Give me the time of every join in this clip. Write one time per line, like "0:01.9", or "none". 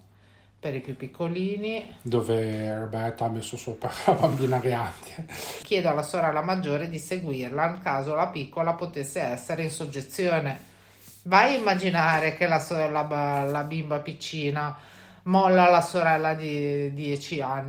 0:05.6